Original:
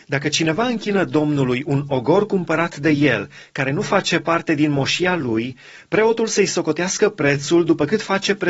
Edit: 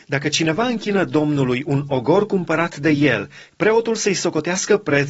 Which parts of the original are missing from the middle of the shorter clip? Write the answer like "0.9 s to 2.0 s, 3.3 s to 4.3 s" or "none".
3.5 s to 5.8 s